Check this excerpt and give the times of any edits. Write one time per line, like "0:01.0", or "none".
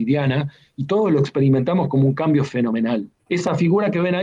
0:03.2